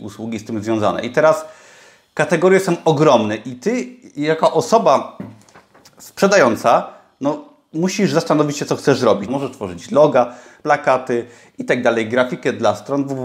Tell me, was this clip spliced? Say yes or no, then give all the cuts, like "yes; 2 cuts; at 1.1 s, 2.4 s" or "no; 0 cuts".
yes; 2 cuts; at 9.3 s, 10.6 s